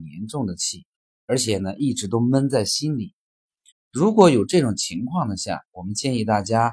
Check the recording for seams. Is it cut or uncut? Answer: cut